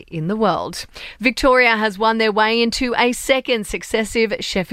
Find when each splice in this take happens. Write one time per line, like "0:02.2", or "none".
0:01.2